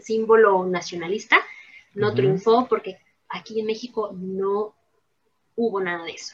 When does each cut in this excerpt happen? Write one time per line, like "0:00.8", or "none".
none